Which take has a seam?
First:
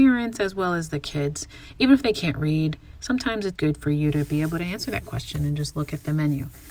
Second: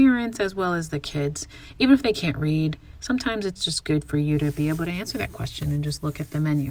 first; 1 cut; at 3.6 s

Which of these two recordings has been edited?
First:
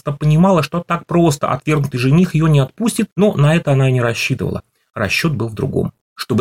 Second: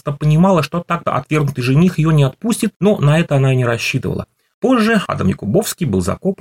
second; 2 cuts; at 1.1 s, 4.5 s

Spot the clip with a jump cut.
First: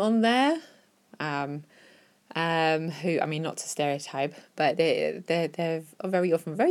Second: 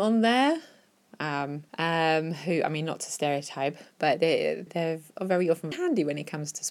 second; 3 cuts; at 1.7 s, 4.7 s, 5.7 s

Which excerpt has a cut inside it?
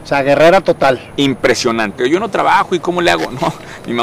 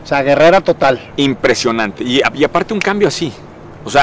first; 1 cut; at 2.0 s

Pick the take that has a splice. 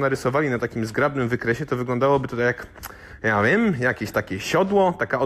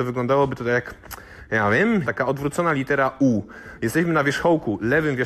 second; 1 cut; at 2.0 s

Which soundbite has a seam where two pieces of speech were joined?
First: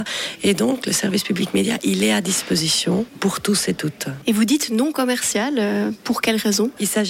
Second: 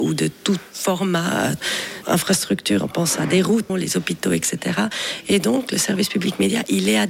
second; 1 cut; at 3.7 s

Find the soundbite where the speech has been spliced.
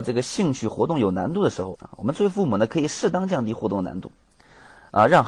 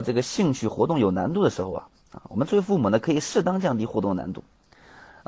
first; 1 cut; at 1.7 s

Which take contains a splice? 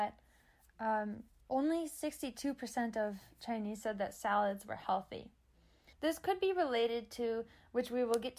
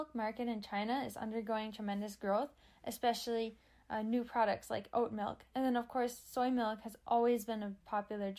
first; 1 cut; at 5.9 s

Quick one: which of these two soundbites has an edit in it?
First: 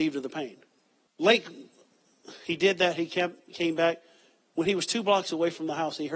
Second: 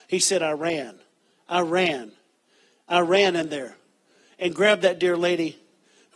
first; 1 cut; at 1.1 s

